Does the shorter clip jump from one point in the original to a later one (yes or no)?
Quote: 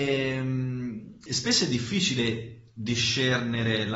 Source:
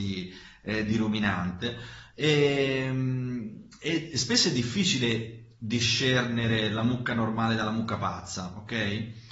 yes